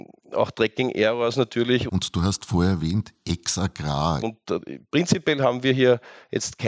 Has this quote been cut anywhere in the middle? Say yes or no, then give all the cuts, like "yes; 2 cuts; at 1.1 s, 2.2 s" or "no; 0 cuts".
yes; 2 cuts; at 1.9 s, 4.2 s